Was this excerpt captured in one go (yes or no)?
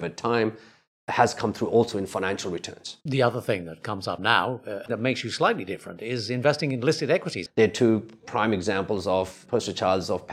no